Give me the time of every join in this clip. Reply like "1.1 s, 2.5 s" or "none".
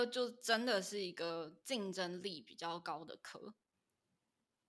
none

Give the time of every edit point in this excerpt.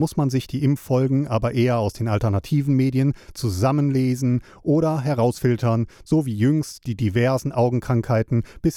none

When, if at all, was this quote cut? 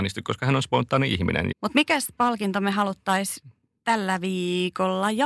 1.5 s

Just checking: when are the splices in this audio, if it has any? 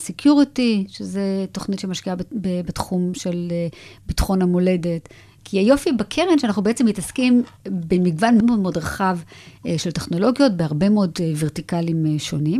5.4 s, 8.4 s

